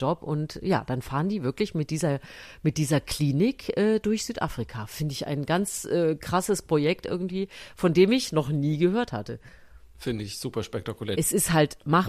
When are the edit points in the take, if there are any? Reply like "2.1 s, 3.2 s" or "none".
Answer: 11.1 s